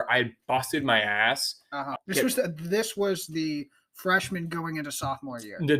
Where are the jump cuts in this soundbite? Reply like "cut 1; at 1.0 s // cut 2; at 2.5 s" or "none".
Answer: cut 1; at 2.0 s

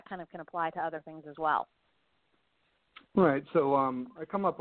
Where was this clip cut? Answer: none

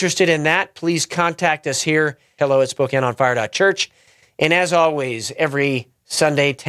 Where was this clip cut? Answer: cut 1; at 2.4 s

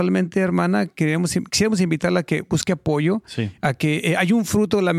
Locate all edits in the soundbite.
none

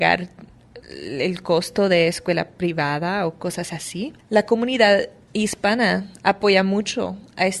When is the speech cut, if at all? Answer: cut 1; at 4.2 s

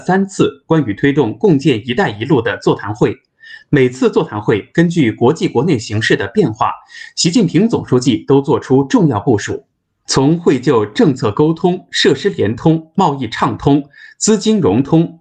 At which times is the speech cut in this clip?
none

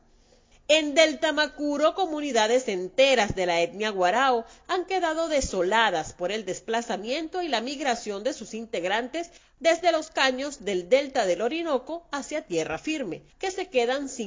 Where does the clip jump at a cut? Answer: cut 1; at 13.3 s

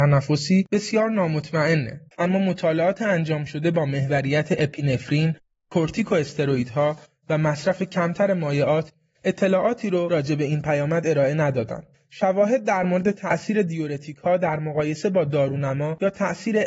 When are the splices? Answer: cut 1; at 2.1 s

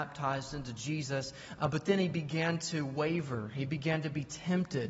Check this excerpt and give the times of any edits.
none

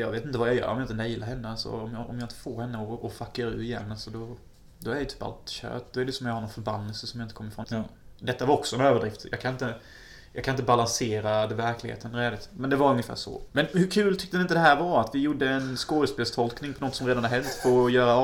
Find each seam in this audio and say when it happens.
cut 1; at 7.6 s // cut 2; at 13.5 s

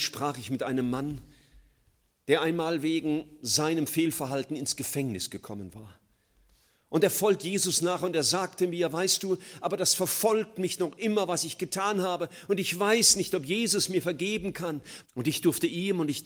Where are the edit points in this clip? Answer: cut 1; at 15.0 s

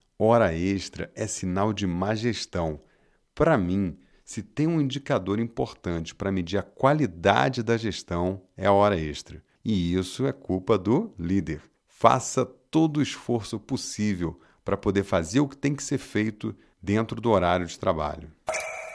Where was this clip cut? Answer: cut 1; at 9.6 s // cut 2; at 11.8 s

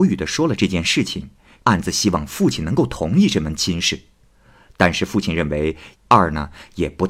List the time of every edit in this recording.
cut 1; at 5.9 s

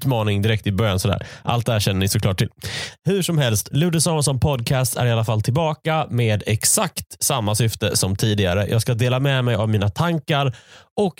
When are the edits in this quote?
cut 1; at 3.7 s

